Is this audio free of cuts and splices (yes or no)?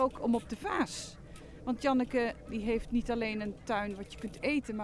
yes